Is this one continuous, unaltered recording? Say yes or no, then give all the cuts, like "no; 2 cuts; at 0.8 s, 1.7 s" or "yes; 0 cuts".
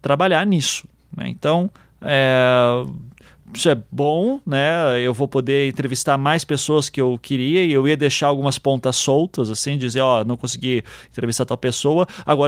yes; 0 cuts